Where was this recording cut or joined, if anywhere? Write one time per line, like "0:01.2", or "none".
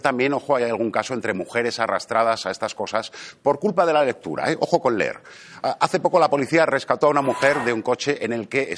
none